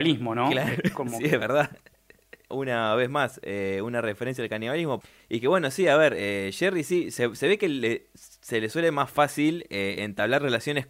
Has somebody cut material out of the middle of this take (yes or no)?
no